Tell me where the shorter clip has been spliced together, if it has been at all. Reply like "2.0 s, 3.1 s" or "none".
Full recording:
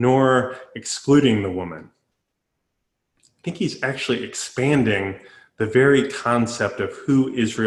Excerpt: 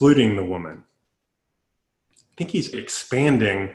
2.7 s